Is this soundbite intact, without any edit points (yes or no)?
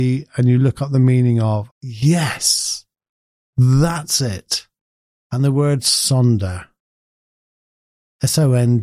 no